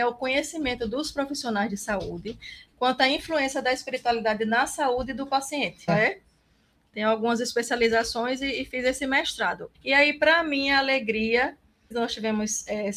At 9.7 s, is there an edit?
yes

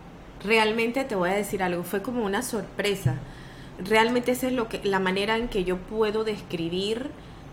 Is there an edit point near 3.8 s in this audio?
yes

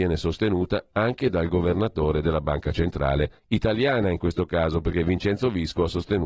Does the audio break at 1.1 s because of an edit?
no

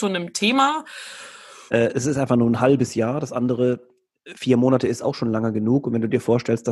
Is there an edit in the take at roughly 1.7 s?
yes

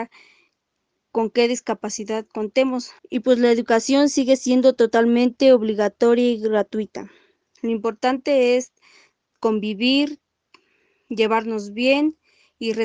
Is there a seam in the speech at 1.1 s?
no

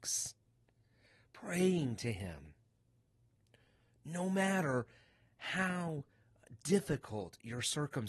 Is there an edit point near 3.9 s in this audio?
no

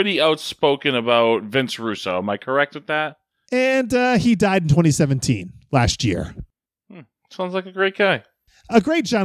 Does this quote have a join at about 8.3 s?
no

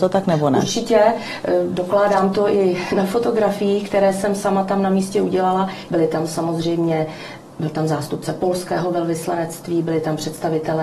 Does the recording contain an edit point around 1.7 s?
no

